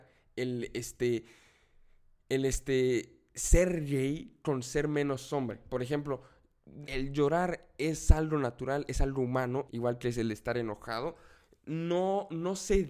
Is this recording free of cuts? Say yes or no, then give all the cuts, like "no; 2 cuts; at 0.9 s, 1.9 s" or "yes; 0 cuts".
no; 2 cuts; at 6.8 s, 9.7 s